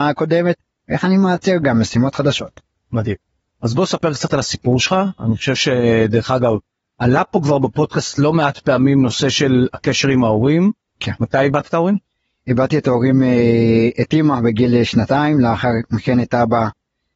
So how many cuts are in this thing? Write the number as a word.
one